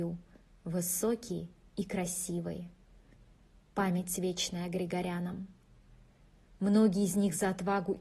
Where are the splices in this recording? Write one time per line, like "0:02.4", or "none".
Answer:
0:06.5

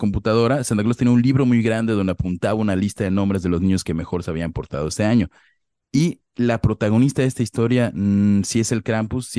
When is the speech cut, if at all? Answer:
none

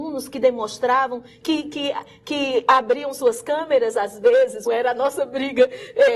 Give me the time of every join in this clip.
0:04.7

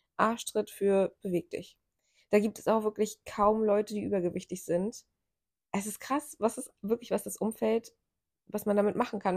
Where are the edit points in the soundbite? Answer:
none

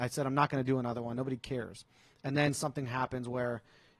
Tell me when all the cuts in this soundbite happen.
none

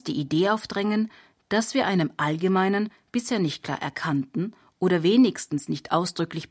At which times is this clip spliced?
none

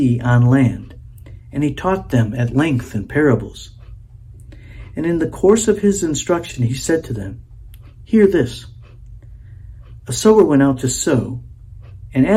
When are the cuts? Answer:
none

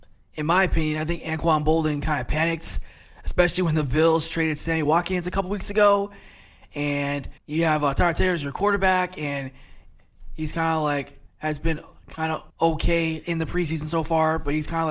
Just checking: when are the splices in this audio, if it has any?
0:07.4
0:11.3
0:12.5

